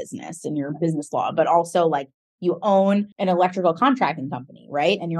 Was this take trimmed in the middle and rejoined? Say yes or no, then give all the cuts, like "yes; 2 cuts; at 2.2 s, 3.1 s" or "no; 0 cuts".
yes; 1 cut; at 3.1 s